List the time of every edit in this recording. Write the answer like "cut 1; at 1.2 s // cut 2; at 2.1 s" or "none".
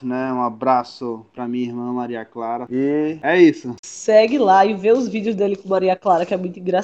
cut 1; at 2.7 s // cut 2; at 3.8 s